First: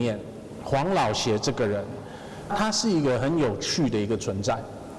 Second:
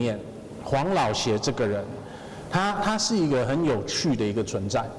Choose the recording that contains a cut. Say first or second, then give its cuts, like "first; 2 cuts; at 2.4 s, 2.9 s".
first; 1 cut; at 2.5 s